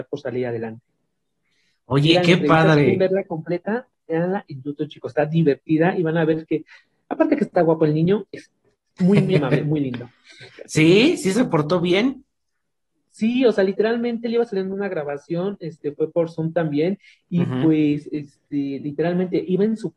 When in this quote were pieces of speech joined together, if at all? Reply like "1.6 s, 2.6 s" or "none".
none